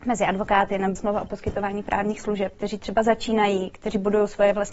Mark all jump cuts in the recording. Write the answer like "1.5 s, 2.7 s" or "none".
0.9 s, 2.5 s